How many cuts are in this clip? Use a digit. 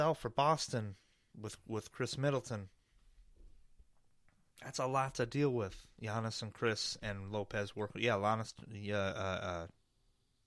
0